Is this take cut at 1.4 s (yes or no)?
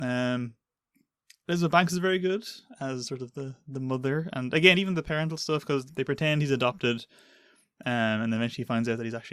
no